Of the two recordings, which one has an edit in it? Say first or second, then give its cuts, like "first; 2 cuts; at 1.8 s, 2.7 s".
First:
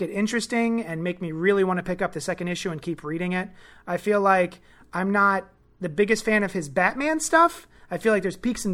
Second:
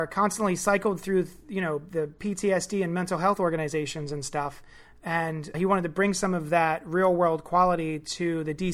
second; 1 cut; at 5.5 s